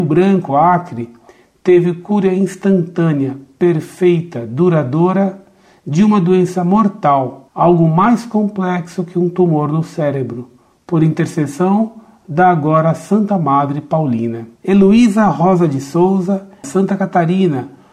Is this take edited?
yes; 2 cuts; at 14.6 s, 16.6 s

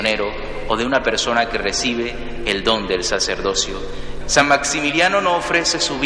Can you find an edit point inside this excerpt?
yes; 1 cut; at 4.2 s

